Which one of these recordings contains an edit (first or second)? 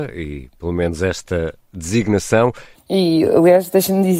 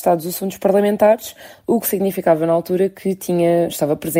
first